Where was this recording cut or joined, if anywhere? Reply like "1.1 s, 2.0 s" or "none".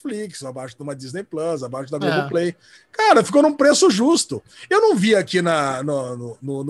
none